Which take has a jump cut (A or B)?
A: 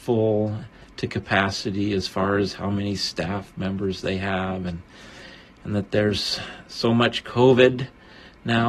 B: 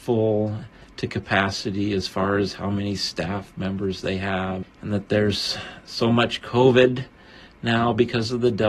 B